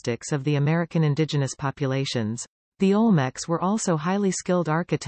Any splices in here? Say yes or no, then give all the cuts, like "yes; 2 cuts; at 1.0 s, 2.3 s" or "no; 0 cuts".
yes; 1 cut; at 2.7 s